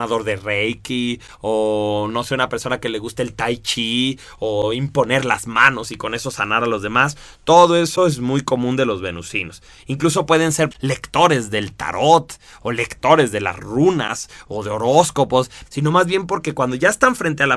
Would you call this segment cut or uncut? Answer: cut